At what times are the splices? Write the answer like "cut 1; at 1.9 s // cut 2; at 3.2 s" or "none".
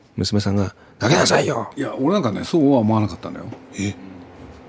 cut 1; at 1.7 s